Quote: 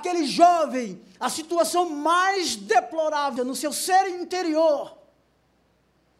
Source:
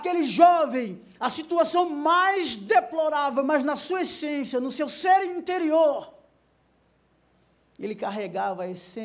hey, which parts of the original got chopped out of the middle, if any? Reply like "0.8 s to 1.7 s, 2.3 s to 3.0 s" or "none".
3.4 s to 4.5 s